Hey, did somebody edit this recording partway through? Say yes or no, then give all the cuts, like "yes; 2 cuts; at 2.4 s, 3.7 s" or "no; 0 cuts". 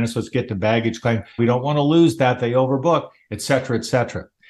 yes; 1 cut; at 1.4 s